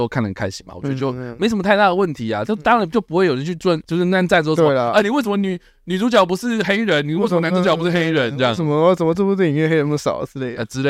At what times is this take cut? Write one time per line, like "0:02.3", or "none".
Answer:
none